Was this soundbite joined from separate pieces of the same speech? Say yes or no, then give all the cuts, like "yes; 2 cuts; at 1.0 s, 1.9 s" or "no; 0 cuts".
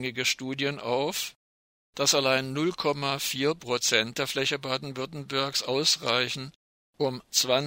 no; 0 cuts